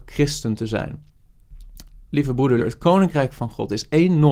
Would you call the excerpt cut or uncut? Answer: cut